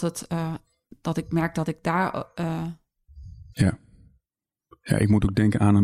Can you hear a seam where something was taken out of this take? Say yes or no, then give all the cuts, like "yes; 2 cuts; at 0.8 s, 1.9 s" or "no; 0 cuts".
yes; 1 cut; at 3.5 s